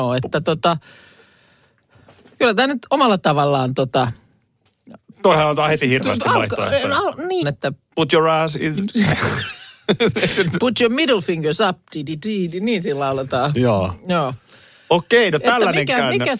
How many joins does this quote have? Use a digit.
1